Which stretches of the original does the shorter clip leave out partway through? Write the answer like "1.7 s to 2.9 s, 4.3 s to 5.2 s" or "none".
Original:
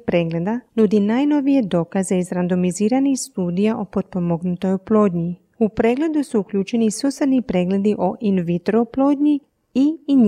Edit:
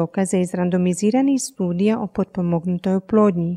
none